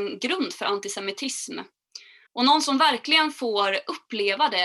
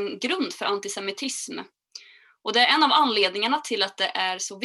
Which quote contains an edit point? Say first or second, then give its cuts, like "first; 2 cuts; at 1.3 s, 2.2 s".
first; 1 cut; at 2.3 s